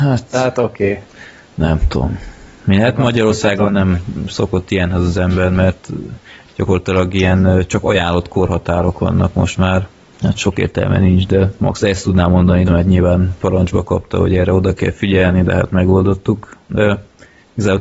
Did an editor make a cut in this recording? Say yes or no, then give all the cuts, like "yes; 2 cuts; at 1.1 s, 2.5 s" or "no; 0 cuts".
yes; 2 cuts; at 10.1 s, 12.7 s